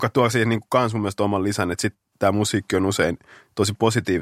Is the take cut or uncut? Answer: uncut